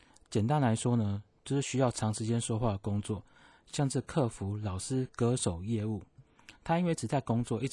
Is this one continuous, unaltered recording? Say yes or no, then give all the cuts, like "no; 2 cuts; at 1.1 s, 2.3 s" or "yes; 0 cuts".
yes; 0 cuts